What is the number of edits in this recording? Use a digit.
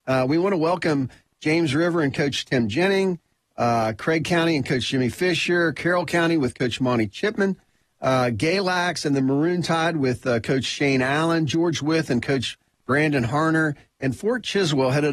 0